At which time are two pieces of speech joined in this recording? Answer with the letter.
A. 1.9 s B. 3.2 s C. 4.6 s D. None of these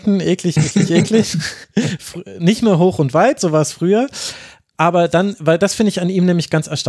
D